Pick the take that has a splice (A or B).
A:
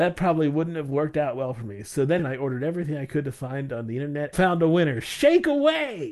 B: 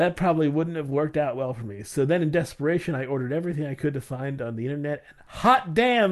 A